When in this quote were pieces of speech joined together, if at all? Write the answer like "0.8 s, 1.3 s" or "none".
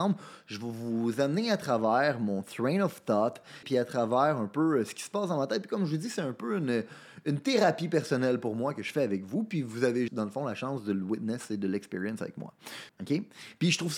3.6 s, 10.1 s, 12.9 s